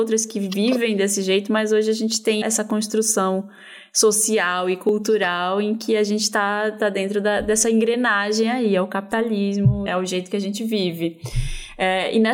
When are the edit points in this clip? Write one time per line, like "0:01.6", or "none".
0:02.4
0:09.9